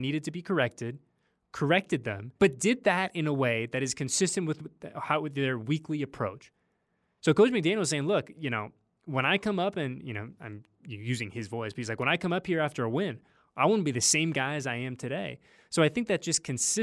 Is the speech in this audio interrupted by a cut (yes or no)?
yes